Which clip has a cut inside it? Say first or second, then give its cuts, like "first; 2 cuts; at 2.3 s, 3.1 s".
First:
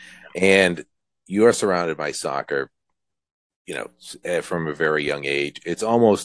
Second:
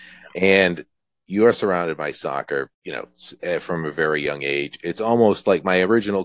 second; 1 cut; at 2.7 s